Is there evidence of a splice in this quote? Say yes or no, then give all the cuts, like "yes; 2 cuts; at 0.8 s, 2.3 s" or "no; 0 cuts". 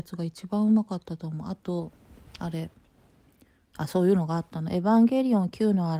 no; 0 cuts